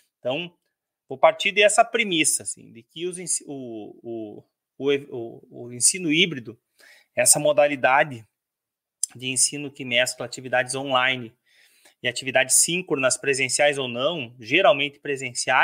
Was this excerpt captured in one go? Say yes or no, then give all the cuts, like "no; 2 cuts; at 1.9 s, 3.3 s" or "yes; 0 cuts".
yes; 0 cuts